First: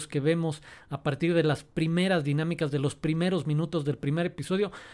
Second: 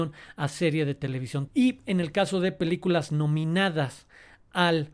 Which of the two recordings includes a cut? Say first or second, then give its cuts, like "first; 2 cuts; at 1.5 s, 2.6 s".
second; 1 cut; at 1.5 s